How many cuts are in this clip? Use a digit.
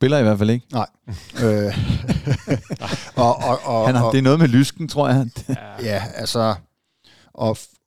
0